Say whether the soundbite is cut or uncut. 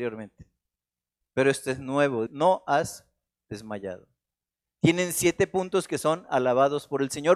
cut